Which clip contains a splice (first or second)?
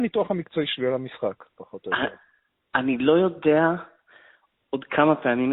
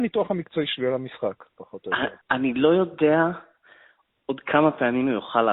second